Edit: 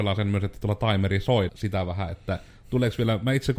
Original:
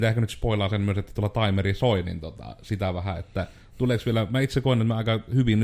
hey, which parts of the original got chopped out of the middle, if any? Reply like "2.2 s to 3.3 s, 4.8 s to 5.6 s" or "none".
2.0 s to 2.6 s

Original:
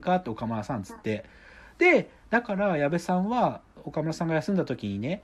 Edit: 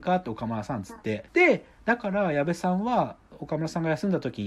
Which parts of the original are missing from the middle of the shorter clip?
1.3 s to 1.7 s

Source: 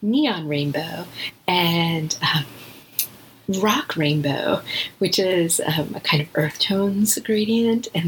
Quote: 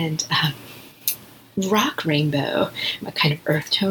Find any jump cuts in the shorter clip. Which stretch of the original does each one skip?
4.9 s to 5.9 s

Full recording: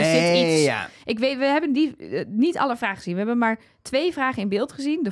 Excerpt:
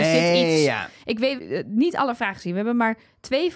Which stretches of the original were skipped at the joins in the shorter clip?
1.4 s to 2.0 s

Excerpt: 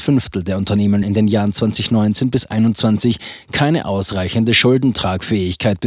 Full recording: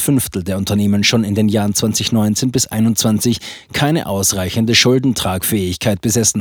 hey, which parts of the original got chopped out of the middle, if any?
1.0 s to 1.2 s

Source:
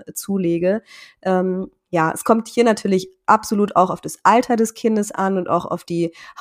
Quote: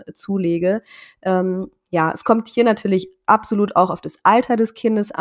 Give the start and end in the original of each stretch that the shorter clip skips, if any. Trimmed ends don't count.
none

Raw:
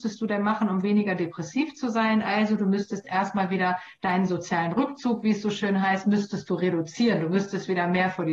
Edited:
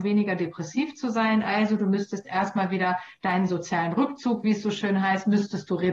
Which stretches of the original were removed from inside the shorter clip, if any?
none

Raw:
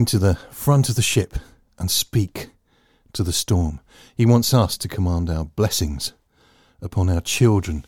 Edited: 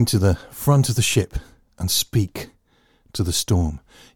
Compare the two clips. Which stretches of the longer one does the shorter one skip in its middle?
none

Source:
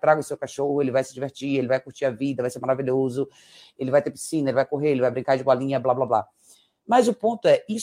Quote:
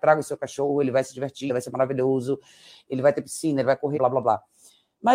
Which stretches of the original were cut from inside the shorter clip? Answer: 1.5 s to 2.4 s, 4.8 s to 5.8 s

